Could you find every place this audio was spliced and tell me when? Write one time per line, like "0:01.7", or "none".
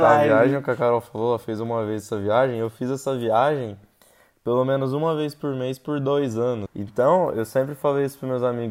0:06.7

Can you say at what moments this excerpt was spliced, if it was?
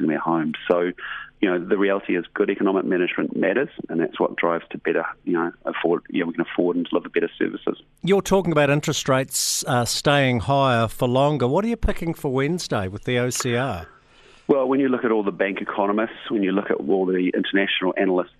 none

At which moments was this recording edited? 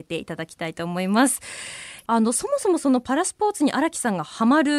none

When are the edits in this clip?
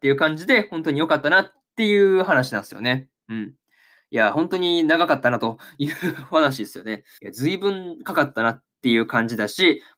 0:07.2

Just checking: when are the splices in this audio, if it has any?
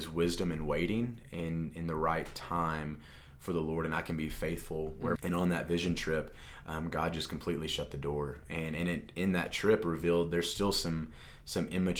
0:05.2

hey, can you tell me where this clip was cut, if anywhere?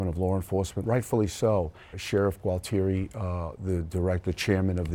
0:01.9

